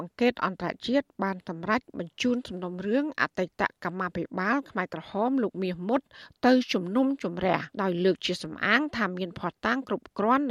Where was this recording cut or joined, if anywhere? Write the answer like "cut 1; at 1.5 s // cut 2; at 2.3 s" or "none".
cut 1; at 7.7 s